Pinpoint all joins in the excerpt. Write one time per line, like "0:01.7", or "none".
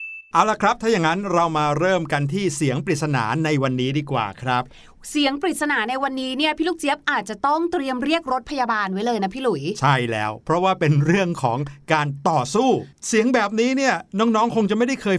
none